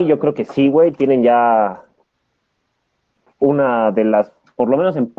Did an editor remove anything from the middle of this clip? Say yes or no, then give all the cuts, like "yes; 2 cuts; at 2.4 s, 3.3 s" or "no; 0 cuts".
no; 0 cuts